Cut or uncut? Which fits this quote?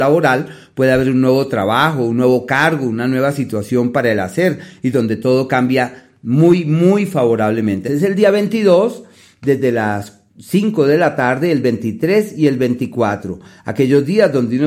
cut